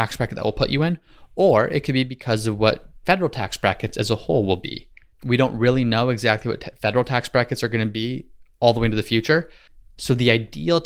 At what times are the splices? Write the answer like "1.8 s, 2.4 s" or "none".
5.1 s, 9.9 s